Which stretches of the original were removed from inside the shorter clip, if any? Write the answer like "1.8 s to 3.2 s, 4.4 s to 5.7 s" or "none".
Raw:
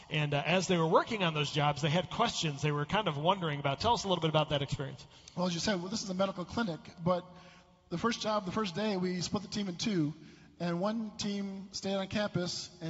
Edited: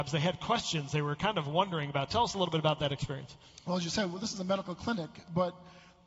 none